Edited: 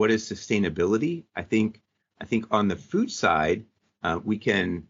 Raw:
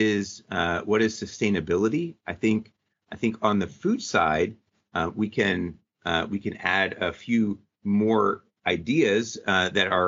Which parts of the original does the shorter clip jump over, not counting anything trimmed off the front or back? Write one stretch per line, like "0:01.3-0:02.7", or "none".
none